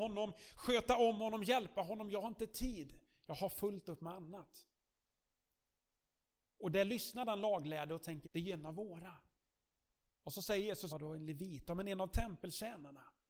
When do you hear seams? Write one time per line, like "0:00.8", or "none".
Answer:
0:08.2
0:10.9